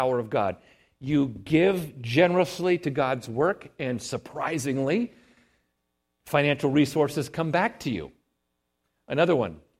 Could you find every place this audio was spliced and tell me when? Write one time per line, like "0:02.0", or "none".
none